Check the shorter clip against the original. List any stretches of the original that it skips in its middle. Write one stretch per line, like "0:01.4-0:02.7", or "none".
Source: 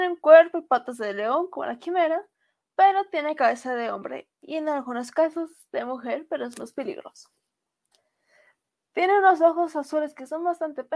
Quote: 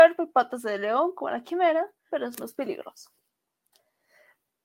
0:02.4-0:06.3